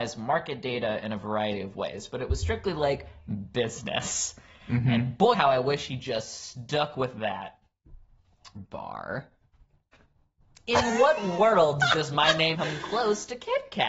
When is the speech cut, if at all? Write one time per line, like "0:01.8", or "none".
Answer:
0:05.3
0:08.6
0:12.5